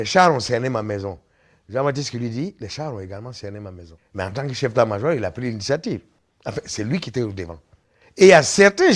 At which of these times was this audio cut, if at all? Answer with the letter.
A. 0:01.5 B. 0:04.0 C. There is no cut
B